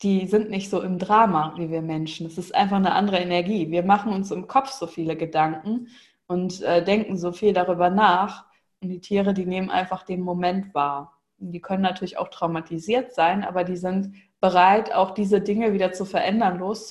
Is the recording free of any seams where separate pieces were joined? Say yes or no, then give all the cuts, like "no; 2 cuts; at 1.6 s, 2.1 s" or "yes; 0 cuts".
yes; 0 cuts